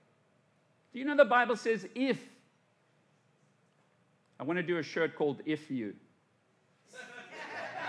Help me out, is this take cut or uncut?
uncut